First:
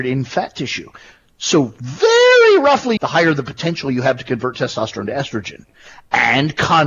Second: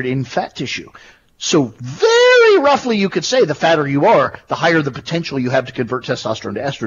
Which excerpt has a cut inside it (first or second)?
first